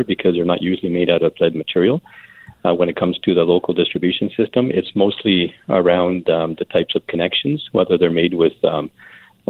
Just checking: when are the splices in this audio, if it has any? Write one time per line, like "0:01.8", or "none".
none